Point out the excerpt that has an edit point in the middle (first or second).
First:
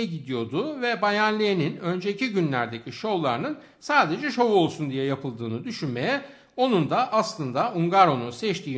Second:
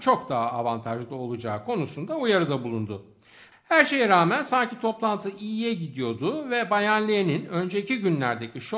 second